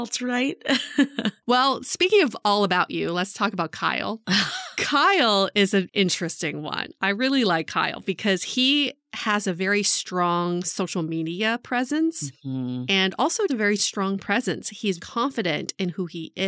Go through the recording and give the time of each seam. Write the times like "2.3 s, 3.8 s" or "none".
13.5 s, 15.0 s